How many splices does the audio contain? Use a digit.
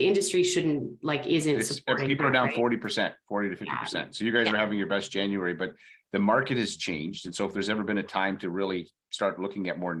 0